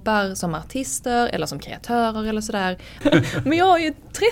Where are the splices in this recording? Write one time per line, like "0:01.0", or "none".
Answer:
0:03.0